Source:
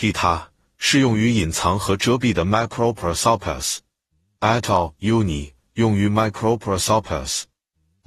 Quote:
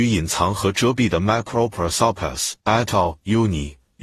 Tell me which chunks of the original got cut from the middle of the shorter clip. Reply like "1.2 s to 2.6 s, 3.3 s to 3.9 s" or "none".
3.8 s to 4.4 s

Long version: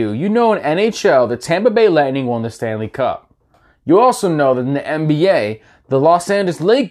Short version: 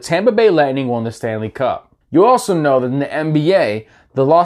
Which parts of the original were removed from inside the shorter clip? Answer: 3.4 s to 3.8 s

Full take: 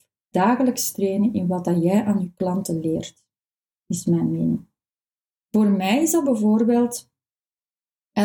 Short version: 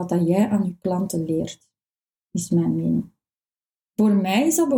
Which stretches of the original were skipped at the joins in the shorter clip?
none

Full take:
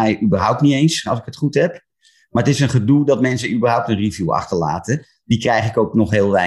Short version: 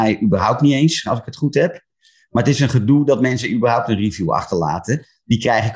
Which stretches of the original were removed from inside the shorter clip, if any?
none

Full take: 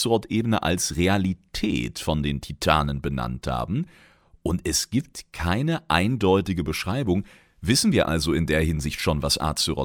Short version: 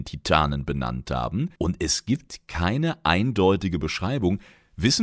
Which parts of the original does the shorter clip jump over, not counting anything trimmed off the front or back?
3.9 s to 4.4 s

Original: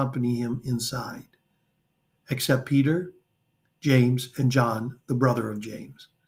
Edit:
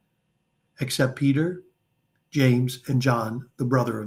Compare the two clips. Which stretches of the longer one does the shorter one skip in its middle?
none

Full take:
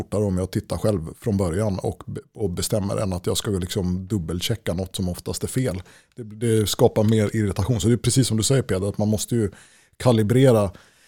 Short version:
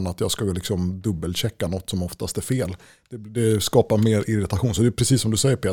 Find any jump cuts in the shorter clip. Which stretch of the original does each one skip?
none

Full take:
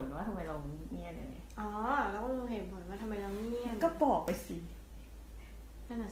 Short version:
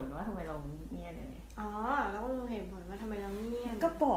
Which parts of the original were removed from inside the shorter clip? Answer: none

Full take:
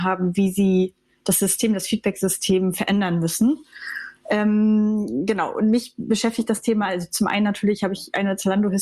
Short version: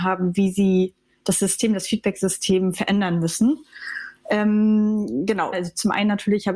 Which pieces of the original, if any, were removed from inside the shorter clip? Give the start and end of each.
5.5 s to 6.9 s

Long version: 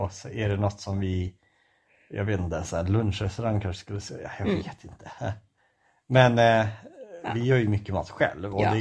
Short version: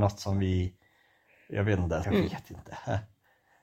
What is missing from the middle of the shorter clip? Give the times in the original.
2.6 s to 4.4 s

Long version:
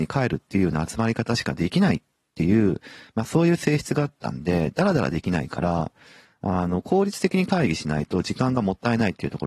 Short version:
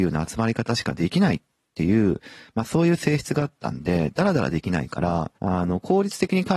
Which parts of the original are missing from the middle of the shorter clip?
6.0 s to 6.4 s

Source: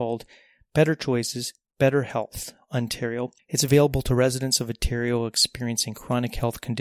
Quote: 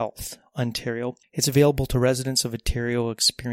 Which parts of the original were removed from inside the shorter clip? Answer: none

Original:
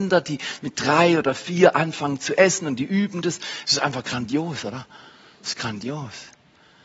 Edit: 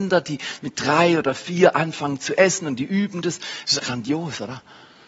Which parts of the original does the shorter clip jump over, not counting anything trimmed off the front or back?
3.8 s to 4.0 s

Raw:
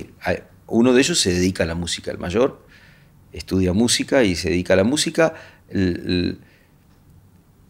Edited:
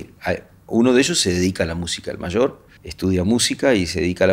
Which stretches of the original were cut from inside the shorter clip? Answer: 2.8 s to 3.3 s

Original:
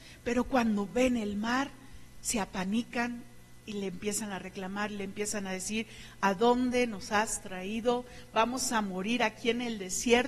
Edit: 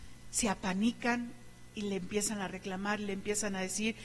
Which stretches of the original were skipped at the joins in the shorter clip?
none

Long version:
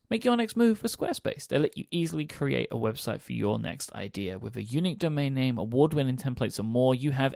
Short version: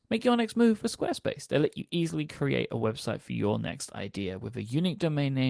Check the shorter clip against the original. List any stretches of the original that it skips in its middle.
none

